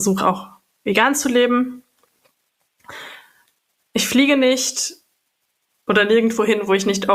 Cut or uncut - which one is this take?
uncut